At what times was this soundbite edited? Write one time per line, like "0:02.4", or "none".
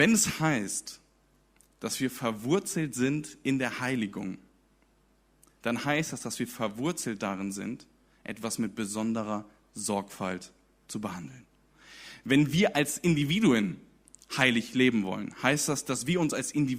none